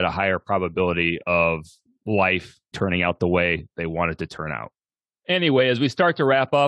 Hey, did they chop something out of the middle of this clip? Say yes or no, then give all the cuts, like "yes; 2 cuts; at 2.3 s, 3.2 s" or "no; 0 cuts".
yes; 1 cut; at 2.7 s